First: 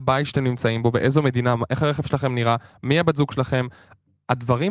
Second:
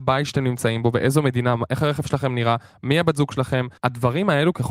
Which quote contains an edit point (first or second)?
second